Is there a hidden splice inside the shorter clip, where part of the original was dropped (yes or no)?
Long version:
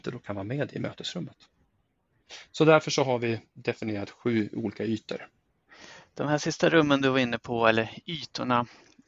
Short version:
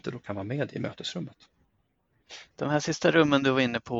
yes